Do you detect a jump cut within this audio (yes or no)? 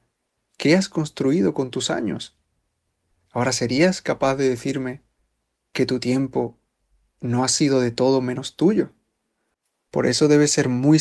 no